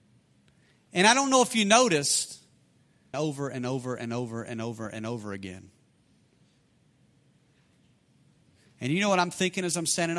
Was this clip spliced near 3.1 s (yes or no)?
yes